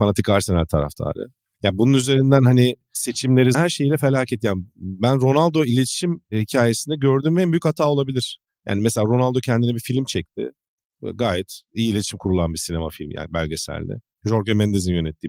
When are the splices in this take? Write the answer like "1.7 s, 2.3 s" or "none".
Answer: 3.5 s